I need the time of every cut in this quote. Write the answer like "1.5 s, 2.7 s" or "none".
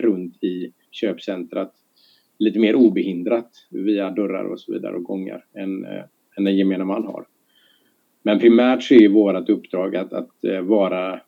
none